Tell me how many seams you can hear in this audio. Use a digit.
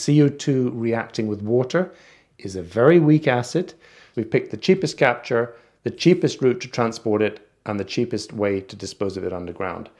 1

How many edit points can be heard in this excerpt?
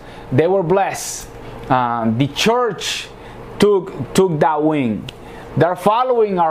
1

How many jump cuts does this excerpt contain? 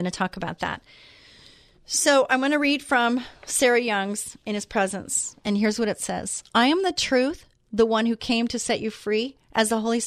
0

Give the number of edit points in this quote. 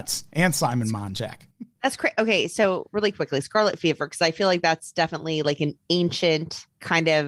0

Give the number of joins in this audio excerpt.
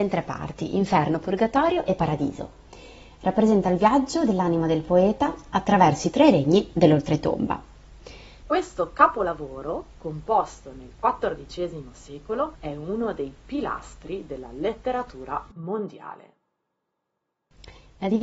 2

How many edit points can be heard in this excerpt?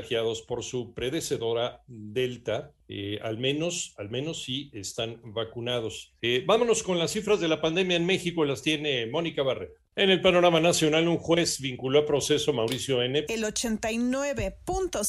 2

